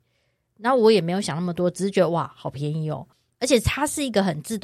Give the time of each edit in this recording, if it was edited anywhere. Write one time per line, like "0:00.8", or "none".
0:03.3